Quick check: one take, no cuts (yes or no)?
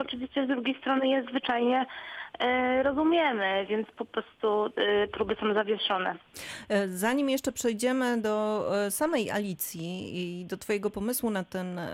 yes